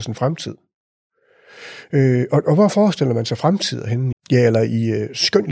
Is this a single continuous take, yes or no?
no